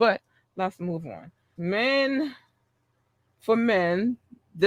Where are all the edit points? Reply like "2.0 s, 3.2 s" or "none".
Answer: 1.6 s

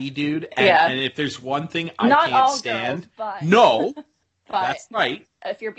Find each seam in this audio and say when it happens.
4.2 s

